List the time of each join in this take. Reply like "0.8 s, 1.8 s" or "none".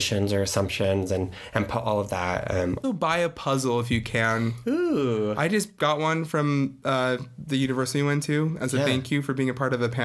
2.8 s